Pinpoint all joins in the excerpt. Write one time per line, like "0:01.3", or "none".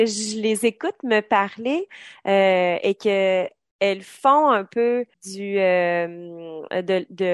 0:05.1